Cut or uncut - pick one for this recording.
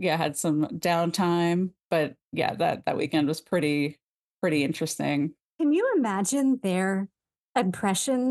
uncut